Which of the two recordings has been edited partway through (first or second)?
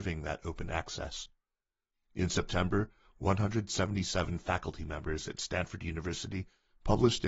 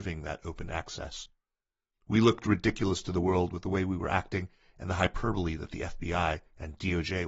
second